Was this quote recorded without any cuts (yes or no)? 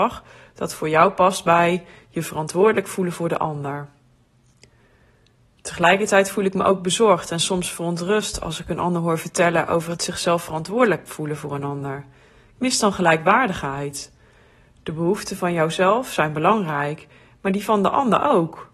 yes